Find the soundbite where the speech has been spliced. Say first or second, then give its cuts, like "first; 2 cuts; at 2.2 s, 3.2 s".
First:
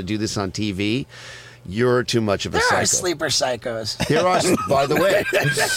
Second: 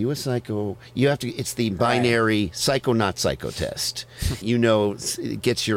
second; 1 cut; at 4.4 s